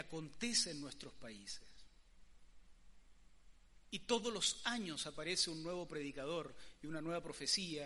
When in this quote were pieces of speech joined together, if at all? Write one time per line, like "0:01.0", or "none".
0:03.9